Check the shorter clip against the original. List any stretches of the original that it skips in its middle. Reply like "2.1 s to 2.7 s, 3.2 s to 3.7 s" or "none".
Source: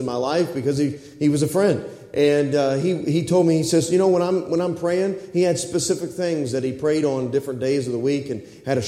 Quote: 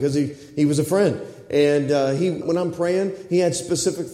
3.0 s to 4.4 s